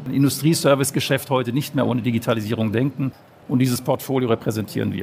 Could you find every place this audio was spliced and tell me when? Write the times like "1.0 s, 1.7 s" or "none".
3.3 s